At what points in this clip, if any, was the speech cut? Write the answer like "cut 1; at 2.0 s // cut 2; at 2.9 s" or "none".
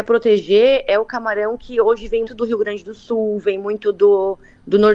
cut 1; at 2.3 s